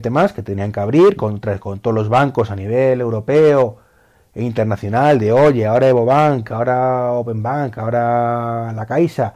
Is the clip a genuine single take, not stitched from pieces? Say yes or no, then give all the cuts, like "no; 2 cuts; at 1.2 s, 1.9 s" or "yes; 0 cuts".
yes; 0 cuts